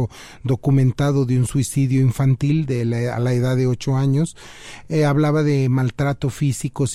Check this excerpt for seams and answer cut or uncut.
uncut